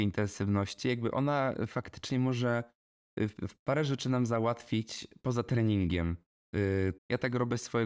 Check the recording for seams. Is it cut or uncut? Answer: cut